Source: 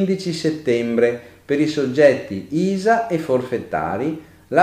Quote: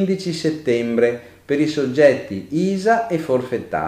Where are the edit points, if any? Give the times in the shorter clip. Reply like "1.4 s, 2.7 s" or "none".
none